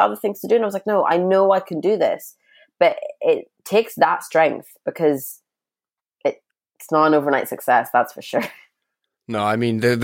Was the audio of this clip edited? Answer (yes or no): no